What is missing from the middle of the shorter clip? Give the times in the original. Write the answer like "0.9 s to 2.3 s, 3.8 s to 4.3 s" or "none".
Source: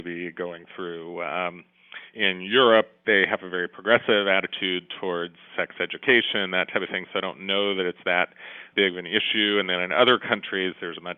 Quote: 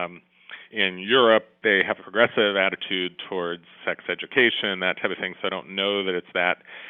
3.4 s to 3.7 s